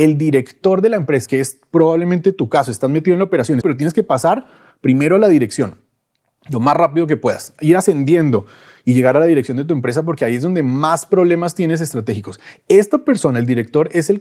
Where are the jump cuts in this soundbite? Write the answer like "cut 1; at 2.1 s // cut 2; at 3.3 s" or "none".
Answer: cut 1; at 1.3 s // cut 2; at 3.6 s